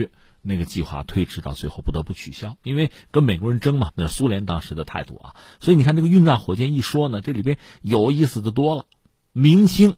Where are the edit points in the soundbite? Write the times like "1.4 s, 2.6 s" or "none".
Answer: 3.9 s